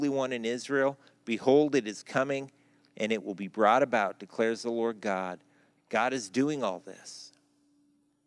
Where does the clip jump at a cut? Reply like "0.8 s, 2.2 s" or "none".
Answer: 5.8 s